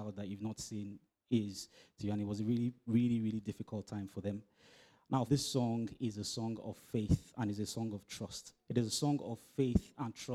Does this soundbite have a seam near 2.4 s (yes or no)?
no